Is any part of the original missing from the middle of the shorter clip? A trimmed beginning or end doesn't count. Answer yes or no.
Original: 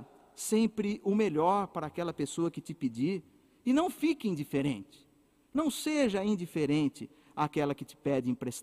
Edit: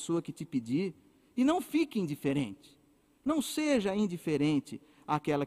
no